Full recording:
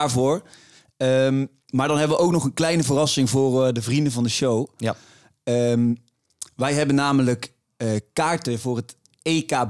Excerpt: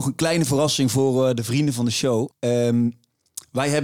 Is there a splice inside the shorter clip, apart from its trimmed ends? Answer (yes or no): yes